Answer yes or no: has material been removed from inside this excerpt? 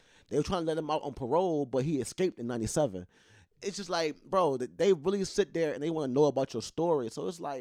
no